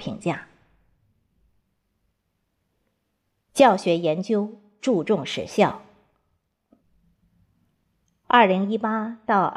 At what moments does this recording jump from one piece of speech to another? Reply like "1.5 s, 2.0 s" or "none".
none